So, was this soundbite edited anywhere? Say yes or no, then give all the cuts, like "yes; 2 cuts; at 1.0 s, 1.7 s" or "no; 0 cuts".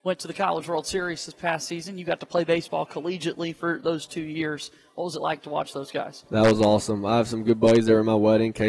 no; 0 cuts